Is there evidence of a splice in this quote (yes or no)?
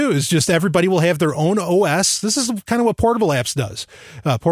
no